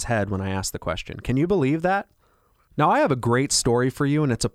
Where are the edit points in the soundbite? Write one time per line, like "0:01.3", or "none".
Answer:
0:02.7